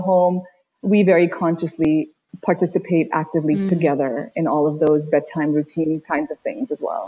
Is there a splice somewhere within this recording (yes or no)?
no